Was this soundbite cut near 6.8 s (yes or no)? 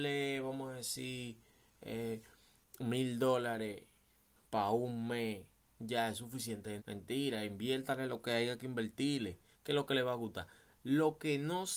yes